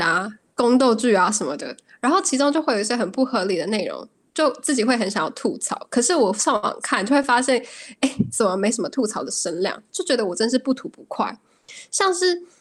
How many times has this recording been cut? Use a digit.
0